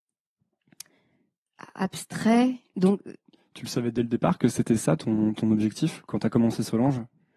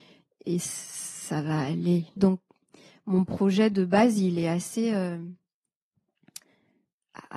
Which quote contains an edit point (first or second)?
second